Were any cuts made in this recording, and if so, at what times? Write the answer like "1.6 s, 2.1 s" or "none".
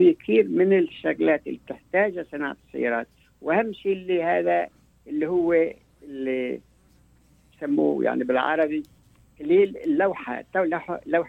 none